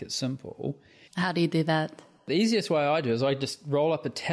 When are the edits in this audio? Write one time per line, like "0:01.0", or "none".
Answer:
0:01.1